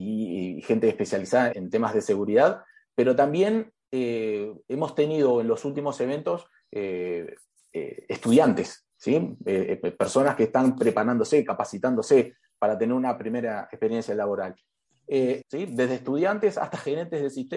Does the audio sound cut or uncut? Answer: cut